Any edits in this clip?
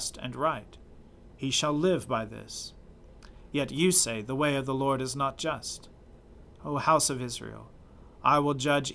no; 0 cuts

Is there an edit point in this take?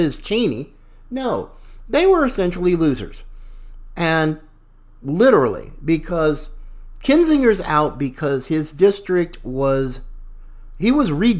no; 0 cuts

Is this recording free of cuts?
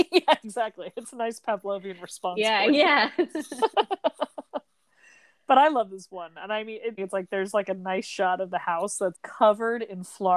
no; 2 cuts; at 7.0 s, 9.1 s

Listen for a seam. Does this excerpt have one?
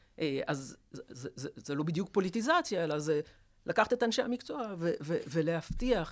no; 0 cuts

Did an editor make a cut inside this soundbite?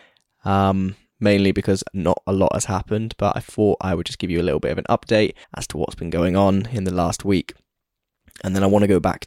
yes; 2 cuts; at 1.1 s, 5.4 s

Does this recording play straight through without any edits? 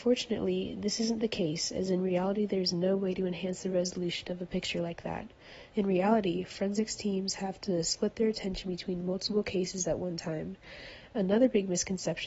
no; 1 cut; at 5.7 s

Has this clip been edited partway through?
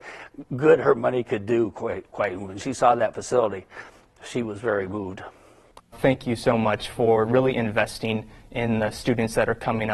yes; 1 cut; at 5.8 s

